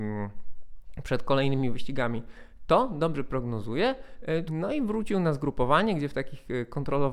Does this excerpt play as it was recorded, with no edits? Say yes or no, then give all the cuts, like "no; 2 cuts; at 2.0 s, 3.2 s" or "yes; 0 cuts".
no; 1 cut; at 4.5 s